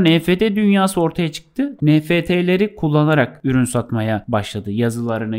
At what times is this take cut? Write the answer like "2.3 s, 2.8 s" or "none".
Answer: 1.8 s